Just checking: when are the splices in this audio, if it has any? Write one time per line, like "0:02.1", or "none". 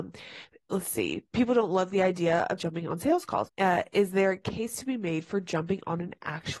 0:03.5